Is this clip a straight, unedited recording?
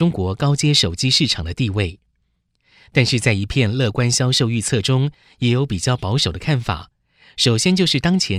yes; 0 cuts

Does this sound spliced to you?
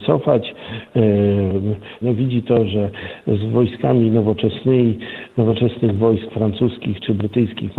yes; 1 cut; at 2.0 s

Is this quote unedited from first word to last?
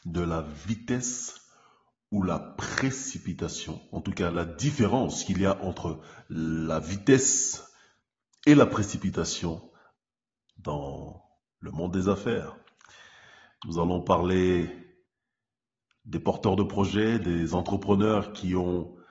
yes; 0 cuts

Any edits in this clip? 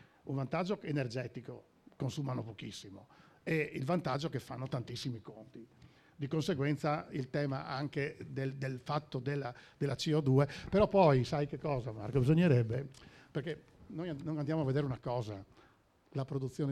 no; 0 cuts

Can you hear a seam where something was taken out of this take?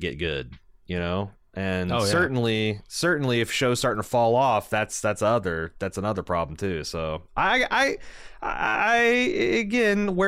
no; 0 cuts

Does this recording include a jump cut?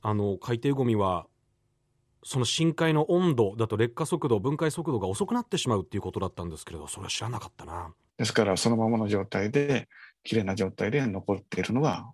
yes; 1 cut; at 8.1 s

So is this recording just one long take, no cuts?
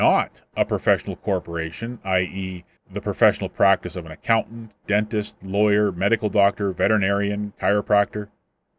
yes; 0 cuts

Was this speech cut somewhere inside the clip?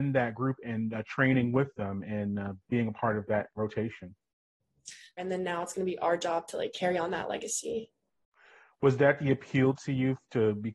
yes; 1 cut; at 5.2 s

